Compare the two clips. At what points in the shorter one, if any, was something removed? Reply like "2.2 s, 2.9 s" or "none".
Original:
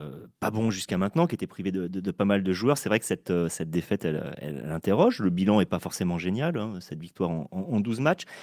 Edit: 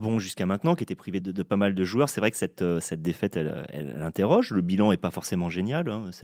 1.2 s

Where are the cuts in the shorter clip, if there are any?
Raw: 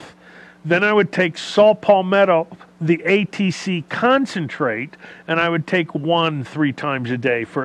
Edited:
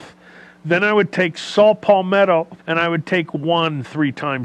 2.6 s

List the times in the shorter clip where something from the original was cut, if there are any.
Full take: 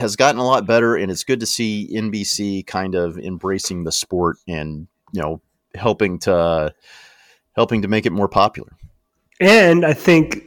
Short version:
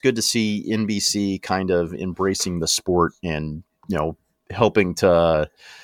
none

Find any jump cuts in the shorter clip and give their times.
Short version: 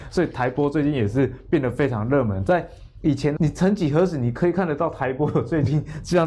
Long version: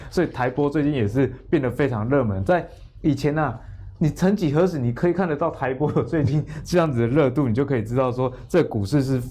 3.4 s

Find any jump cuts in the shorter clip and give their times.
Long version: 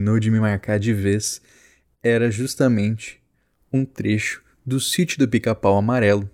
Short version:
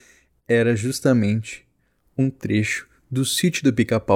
none

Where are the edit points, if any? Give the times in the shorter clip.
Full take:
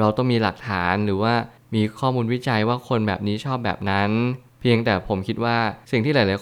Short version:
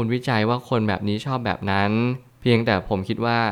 none

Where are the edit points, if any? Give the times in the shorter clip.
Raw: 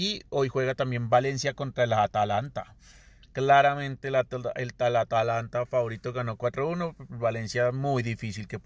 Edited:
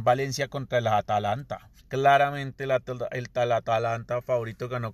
1.8 s

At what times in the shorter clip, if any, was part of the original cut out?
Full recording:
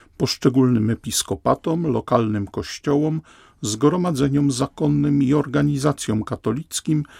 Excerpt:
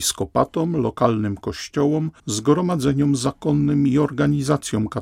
2.2 s

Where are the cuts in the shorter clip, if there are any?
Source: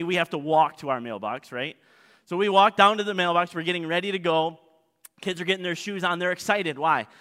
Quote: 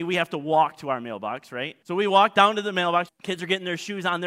1.8 s, 3.1 s

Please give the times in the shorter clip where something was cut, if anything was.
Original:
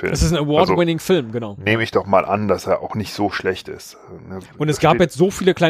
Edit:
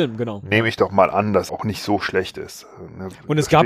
1.5 s

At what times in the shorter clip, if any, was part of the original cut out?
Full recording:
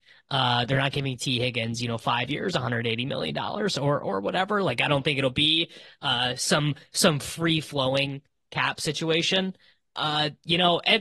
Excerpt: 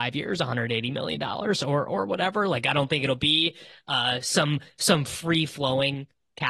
none

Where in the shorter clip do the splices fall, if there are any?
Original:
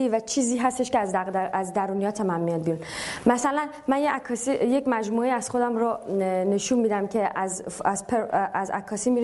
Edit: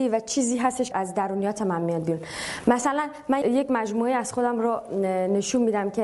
0.9 s, 3.4 s

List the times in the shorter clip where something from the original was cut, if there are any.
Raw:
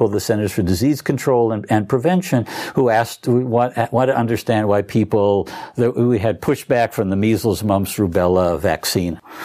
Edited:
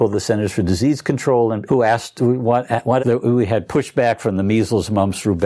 1.7 s, 3.0 s

